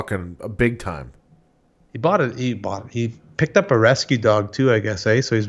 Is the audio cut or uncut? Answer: uncut